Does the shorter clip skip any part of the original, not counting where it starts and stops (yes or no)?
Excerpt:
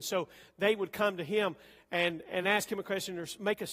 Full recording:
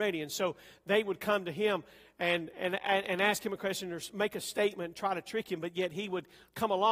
yes